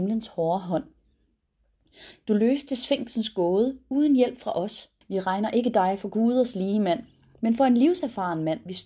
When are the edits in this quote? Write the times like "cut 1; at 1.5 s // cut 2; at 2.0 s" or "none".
cut 1; at 2.1 s // cut 2; at 5.0 s